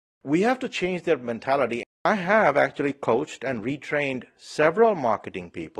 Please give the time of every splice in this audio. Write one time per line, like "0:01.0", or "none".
0:01.9